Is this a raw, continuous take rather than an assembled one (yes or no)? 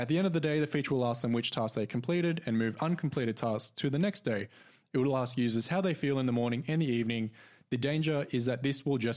yes